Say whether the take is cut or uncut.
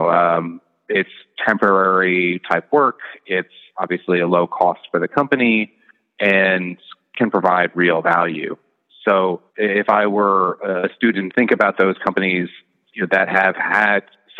cut